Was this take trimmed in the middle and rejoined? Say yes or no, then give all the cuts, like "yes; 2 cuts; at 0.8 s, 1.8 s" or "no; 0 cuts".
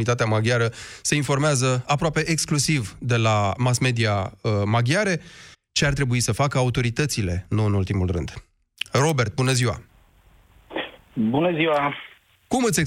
yes; 1 cut; at 5.5 s